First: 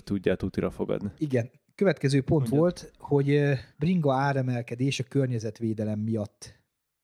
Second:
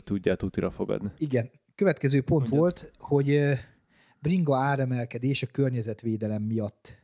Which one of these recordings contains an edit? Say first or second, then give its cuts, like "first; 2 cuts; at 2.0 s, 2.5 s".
first; 1 cut; at 3.7 s